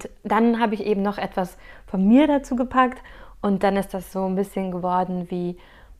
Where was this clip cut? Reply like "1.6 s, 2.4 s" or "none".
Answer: none